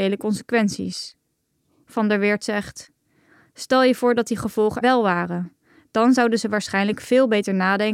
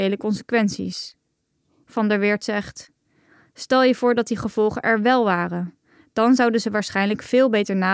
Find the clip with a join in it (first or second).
first